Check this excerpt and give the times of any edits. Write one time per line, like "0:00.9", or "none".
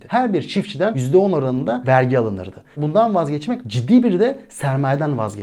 0:02.7